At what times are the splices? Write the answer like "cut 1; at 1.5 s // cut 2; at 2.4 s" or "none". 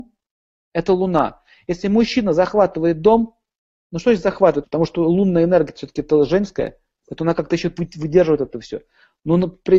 cut 1; at 4.6 s